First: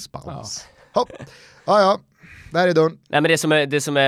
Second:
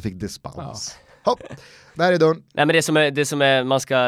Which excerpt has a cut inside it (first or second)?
second